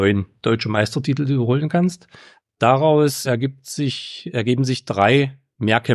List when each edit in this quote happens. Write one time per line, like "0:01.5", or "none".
0:03.3